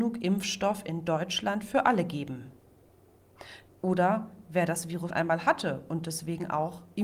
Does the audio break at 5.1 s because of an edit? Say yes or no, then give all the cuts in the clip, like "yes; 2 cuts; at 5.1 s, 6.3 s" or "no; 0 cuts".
yes; 2 cuts; at 3.7 s, 5.1 s